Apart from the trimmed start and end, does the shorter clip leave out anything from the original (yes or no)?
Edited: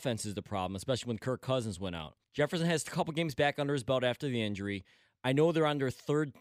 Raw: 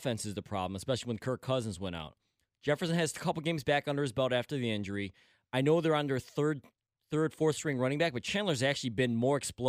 yes